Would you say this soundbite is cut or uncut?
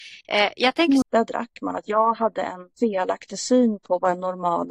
cut